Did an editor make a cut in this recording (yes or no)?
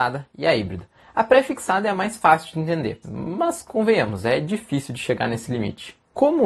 yes